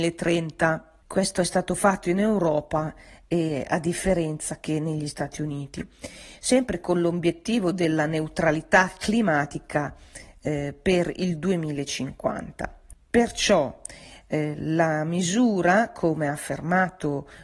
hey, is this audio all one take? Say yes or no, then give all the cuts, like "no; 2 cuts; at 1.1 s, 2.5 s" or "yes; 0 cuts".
yes; 0 cuts